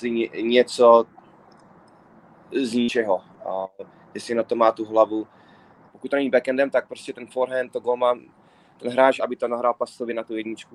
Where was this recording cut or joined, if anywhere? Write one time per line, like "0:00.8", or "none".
0:05.9
0:09.2